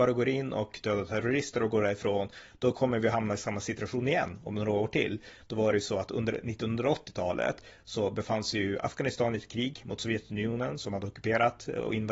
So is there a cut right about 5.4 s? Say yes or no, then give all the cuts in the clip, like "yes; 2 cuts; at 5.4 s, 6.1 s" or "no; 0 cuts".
yes; 1 cut; at 5.4 s